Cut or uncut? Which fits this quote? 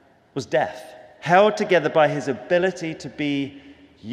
cut